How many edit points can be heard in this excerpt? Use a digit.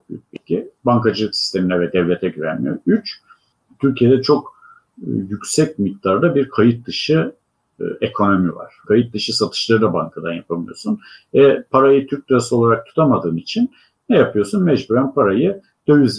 1